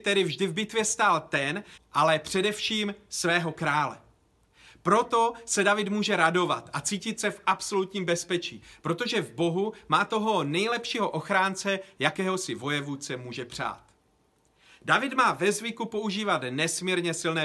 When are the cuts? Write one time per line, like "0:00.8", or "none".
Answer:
0:01.8